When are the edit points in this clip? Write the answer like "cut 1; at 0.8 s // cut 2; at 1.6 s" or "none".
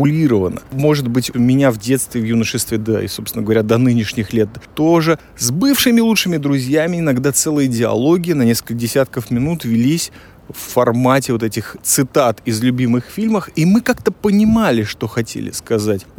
cut 1; at 1.3 s